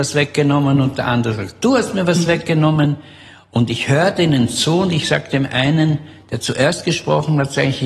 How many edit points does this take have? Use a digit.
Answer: 0